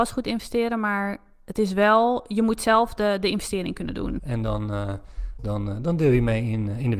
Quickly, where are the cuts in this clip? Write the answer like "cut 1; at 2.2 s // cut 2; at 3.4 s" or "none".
cut 1; at 4.2 s // cut 2; at 5.4 s